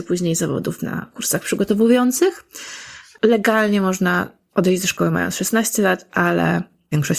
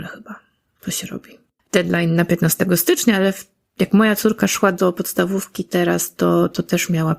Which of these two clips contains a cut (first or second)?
second